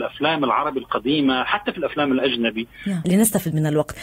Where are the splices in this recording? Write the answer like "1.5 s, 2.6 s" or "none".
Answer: 3.0 s